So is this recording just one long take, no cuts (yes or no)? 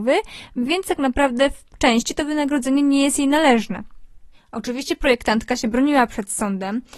yes